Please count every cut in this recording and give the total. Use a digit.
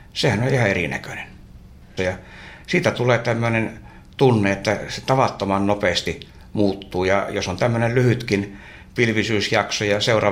1